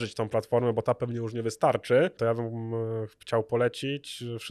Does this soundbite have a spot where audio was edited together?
yes; 1 cut; at 2.2 s

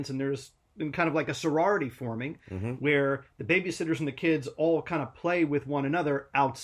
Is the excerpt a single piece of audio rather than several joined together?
yes; 0 cuts

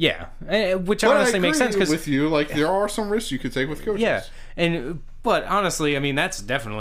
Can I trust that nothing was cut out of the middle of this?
yes; 0 cuts

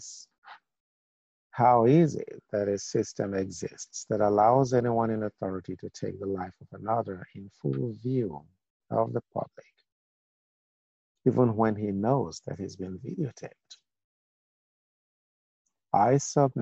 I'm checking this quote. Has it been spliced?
no; 0 cuts

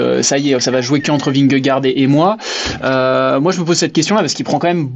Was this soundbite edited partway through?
no; 0 cuts

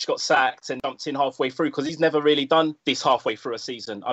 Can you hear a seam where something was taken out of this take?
yes; 1 cut; at 2.8 s

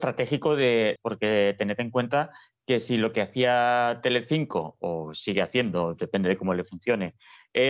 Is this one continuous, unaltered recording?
no; 1 cut; at 1.0 s

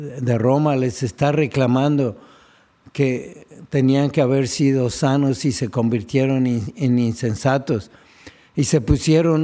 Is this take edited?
no; 0 cuts

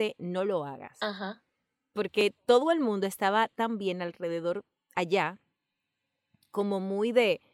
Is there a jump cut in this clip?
no; 0 cuts

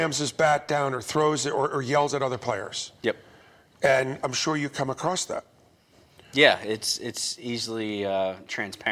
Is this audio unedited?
yes; 0 cuts

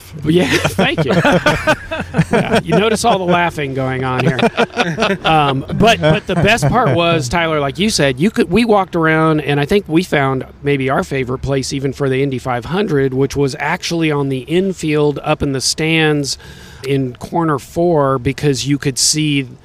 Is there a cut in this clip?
yes; 1 cut; at 16.8 s

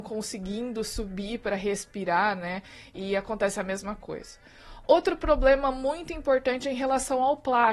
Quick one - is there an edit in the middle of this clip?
no; 0 cuts

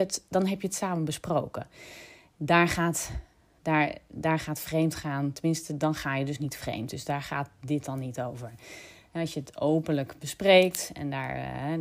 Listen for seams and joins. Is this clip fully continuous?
yes; 0 cuts

